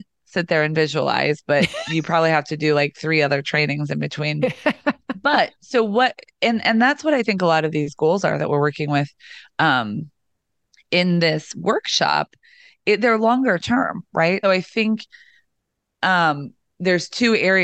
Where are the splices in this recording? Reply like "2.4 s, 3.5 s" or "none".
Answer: 14.4 s